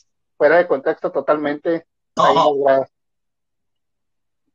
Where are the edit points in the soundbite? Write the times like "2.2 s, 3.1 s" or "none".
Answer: 2.2 s